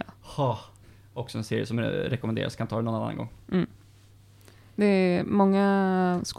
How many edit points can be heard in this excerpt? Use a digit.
0